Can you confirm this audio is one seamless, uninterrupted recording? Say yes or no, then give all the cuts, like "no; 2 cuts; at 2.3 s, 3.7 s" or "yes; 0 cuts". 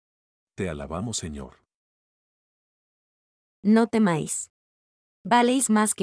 no; 1 cut; at 3.5 s